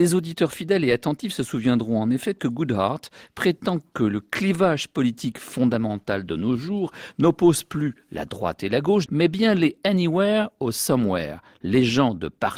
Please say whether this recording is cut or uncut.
cut